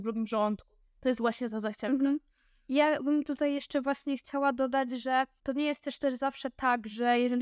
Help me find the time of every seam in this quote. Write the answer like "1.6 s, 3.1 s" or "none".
none